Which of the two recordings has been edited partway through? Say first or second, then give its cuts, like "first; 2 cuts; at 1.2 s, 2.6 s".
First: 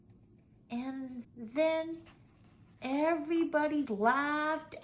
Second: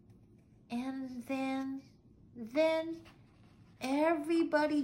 first; 2 cuts; at 1.2 s, 3.9 s